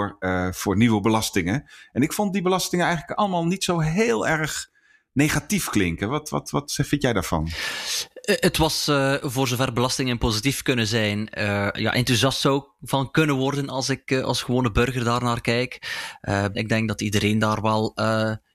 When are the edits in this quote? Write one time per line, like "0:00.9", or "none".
0:11.7
0:16.5